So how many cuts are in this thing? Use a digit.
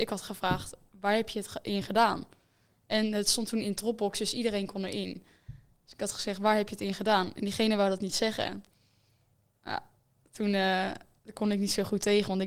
0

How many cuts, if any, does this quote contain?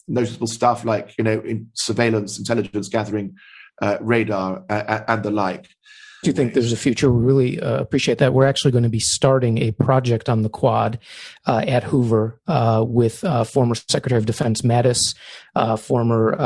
1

